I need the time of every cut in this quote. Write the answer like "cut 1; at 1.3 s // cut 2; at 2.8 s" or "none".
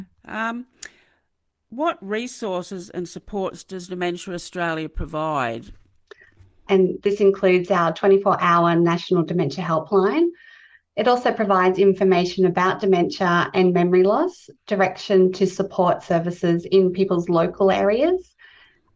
cut 1; at 6.7 s